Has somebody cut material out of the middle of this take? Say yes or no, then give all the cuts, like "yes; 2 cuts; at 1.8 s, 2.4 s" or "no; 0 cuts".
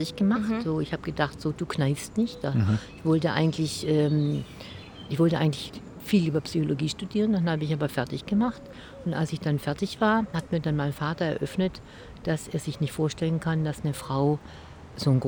no; 0 cuts